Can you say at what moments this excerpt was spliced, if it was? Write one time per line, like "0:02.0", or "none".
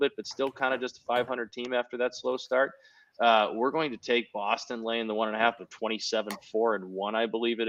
0:05.6